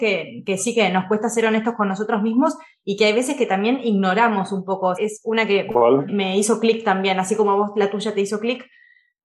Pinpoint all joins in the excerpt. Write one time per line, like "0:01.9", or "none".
0:05.0
0:06.1